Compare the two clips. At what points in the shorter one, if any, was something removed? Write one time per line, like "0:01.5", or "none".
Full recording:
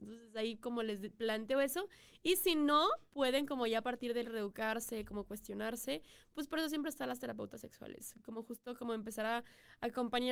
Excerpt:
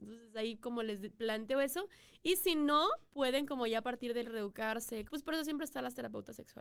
0:05.1